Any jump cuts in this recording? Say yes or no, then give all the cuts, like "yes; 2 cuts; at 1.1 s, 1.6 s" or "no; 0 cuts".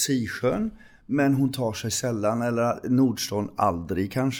no; 0 cuts